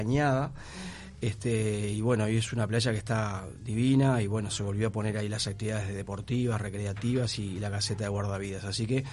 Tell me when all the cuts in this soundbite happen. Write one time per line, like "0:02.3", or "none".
none